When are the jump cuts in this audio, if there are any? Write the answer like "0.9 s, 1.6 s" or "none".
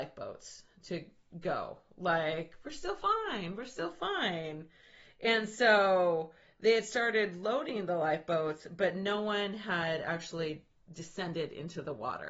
none

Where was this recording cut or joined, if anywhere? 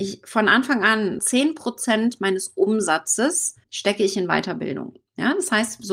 1.2 s, 3.6 s

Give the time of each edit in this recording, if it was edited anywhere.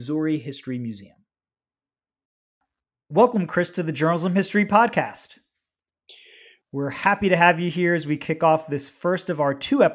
6.6 s

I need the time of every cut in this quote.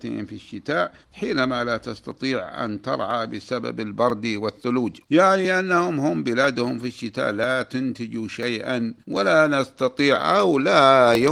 1.0 s, 5.0 s, 9.0 s

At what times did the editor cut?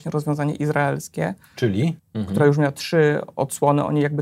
2.0 s

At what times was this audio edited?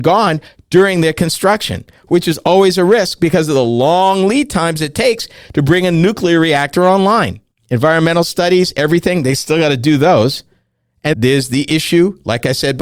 11.1 s

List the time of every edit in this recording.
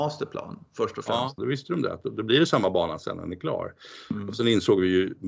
1.4 s

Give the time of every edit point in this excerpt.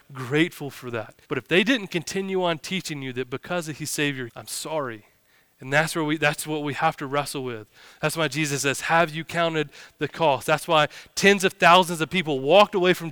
1.2 s, 4.3 s

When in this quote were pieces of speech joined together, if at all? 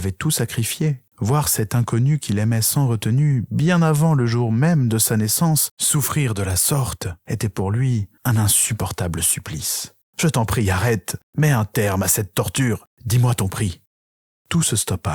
none

